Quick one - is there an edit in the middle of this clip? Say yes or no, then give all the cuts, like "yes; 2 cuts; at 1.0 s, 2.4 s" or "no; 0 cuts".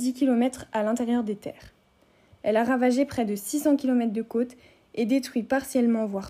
no; 0 cuts